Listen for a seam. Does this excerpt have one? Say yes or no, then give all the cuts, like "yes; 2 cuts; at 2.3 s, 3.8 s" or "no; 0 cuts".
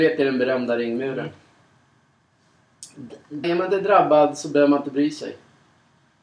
yes; 1 cut; at 3.4 s